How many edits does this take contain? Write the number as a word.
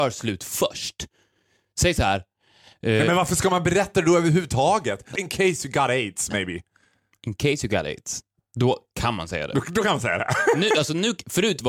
one